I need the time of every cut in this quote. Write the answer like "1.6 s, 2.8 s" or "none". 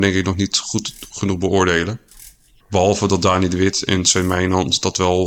none